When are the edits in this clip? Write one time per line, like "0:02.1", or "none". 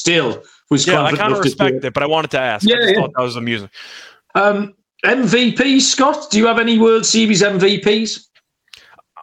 0:04.3